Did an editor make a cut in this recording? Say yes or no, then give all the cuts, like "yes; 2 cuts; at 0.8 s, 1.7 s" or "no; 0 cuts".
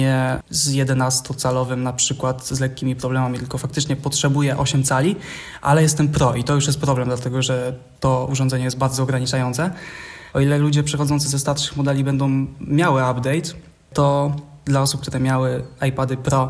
yes; 1 cut; at 10.3 s